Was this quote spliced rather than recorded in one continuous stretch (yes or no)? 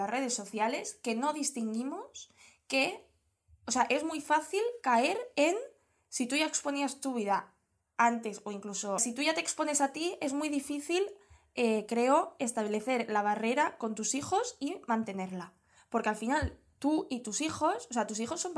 yes